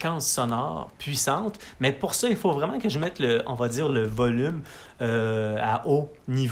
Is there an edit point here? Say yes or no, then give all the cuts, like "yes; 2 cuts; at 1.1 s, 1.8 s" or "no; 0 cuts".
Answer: no; 0 cuts